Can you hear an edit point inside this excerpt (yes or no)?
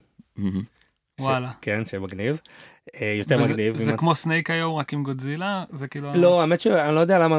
no